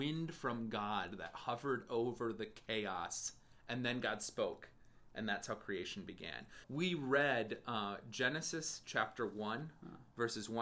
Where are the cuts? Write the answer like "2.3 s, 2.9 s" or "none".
6.6 s